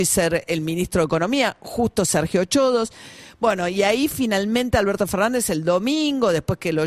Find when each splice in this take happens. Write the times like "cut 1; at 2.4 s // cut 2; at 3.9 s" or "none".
none

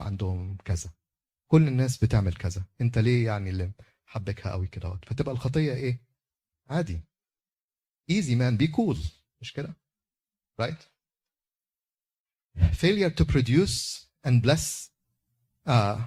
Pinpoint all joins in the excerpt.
cut 1; at 6.5 s

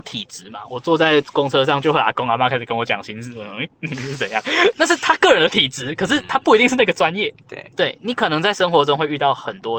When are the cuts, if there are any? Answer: cut 1; at 4.7 s

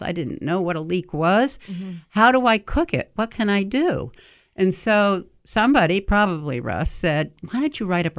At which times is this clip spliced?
none

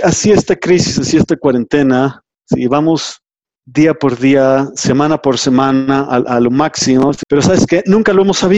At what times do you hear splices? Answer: cut 1; at 2.3 s // cut 2; at 7.2 s

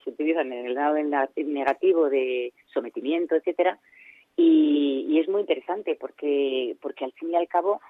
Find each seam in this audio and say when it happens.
none

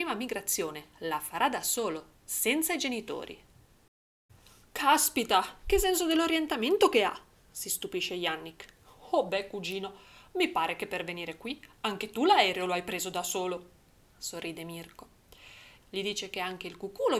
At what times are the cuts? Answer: cut 1; at 15.8 s

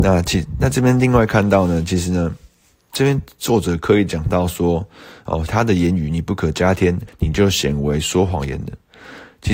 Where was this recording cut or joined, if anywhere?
cut 1; at 5.5 s // cut 2; at 7.1 s

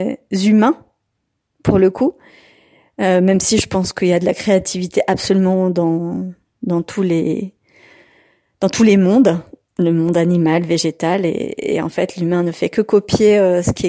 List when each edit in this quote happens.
none

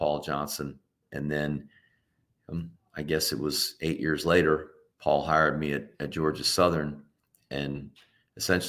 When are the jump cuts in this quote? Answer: cut 1; at 1.0 s

